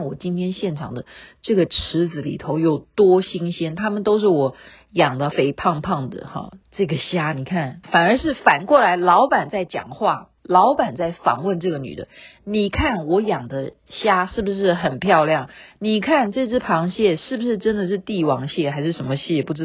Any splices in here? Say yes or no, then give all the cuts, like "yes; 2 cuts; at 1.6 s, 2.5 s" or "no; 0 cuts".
yes; 3 cuts; at 5.3 s, 6.6 s, 7.8 s